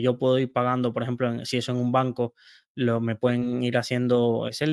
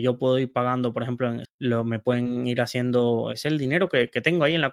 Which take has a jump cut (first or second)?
second